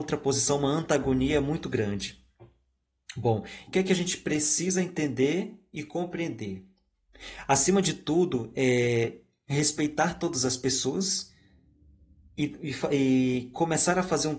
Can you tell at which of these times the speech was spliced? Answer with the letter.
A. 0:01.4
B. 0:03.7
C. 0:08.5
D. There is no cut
B